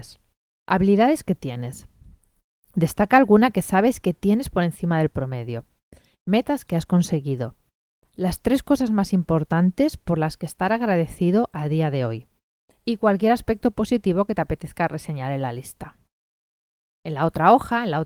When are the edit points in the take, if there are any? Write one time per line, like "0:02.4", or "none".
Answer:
none